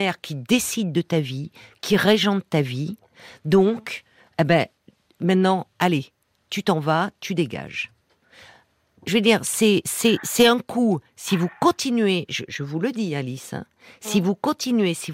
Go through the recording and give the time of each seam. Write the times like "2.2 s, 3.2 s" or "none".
4.3 s, 12.5 s